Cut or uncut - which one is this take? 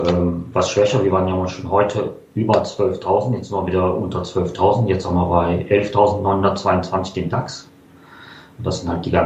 uncut